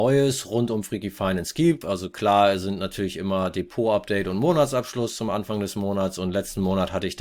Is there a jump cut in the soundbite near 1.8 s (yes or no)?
yes